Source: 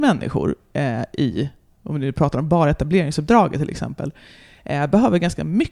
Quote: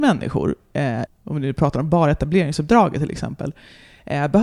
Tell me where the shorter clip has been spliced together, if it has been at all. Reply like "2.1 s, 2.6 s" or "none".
1.1 s